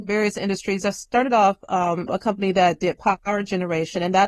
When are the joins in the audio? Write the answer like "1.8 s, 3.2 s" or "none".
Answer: 2.1 s